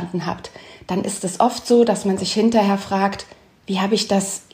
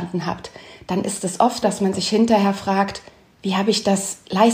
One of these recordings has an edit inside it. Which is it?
second; 1 cut; at 1.6 s

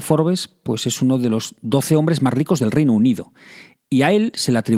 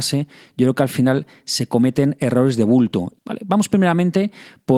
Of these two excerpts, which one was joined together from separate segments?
second; 1 cut; at 3.1 s

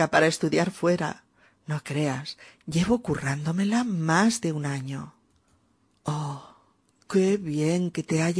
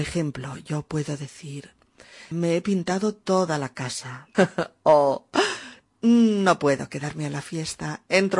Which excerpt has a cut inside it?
second; 2 cuts; at 2.3 s, 4.3 s

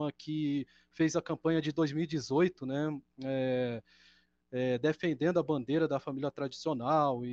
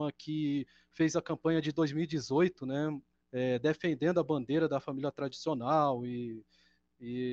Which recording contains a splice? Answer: second; 1 cut; at 3.1 s

